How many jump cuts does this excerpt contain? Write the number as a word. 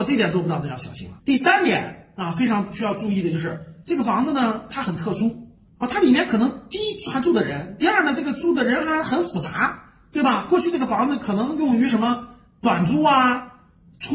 one